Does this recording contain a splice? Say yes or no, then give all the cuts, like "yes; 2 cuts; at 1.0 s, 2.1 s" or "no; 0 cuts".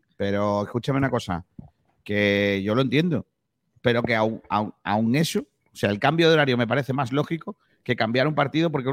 no; 0 cuts